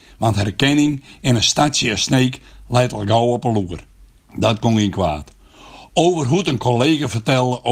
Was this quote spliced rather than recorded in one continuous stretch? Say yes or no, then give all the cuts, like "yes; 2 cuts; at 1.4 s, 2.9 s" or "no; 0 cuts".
yes; 1 cut; at 4.2 s